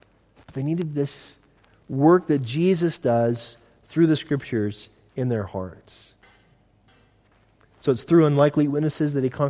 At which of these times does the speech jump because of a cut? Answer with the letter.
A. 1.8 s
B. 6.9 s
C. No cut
C